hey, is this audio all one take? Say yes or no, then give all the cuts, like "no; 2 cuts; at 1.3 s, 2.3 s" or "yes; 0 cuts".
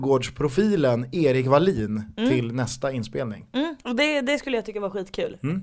yes; 0 cuts